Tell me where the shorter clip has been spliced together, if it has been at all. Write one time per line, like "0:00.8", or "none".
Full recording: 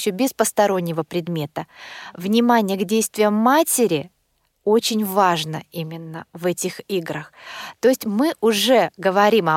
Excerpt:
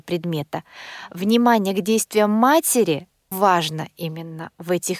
0:03.3